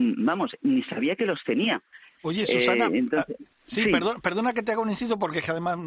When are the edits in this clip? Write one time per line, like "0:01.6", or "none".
0:02.2